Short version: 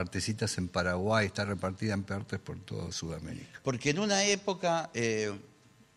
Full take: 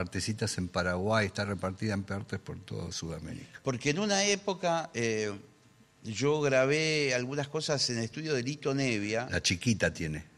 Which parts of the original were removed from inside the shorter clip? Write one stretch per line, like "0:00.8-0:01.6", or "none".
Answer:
none